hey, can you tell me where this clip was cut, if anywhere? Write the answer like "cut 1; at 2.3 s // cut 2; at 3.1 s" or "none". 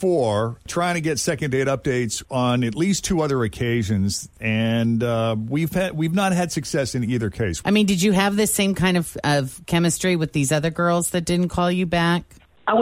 cut 1; at 7.6 s